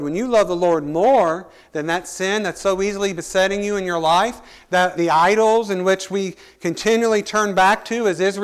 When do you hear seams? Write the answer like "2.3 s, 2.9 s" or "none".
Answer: 5.0 s

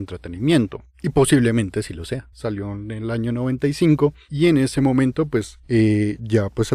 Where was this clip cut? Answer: 2.3 s

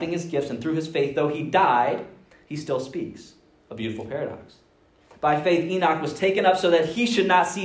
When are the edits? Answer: none

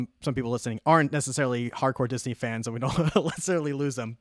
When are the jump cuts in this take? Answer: none

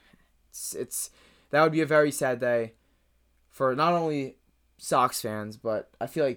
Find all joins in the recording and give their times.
none

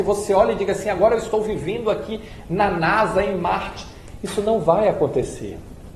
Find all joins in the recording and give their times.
none

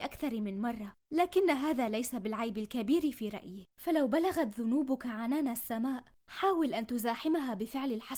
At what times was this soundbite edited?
3.7 s

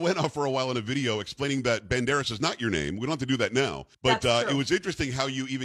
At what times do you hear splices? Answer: 3.9 s

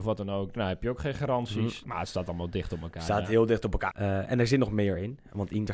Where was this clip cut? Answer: 1.8 s, 3.9 s

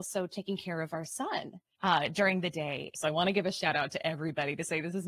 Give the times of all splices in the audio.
1.7 s, 2.9 s

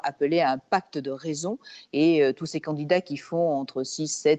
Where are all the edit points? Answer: 1.9 s

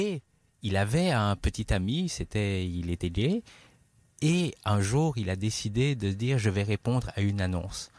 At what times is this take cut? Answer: none

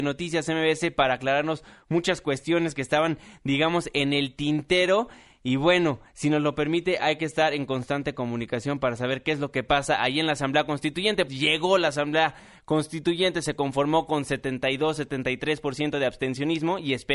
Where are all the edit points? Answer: 11.3 s

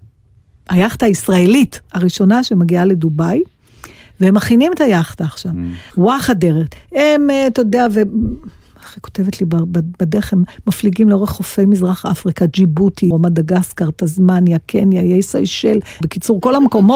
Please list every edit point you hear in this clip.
5.9 s, 13.1 s, 16.0 s

